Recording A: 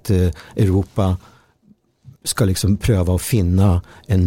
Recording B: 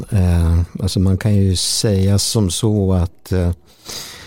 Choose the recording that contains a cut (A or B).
A